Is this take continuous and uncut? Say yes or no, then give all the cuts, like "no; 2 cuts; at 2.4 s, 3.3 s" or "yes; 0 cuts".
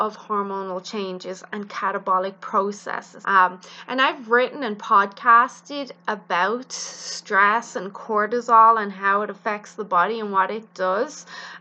no; 1 cut; at 3.2 s